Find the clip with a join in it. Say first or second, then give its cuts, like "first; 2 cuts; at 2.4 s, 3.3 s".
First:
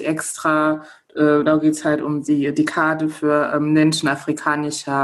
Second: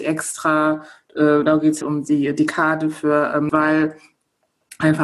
second; 2 cuts; at 1.8 s, 3.5 s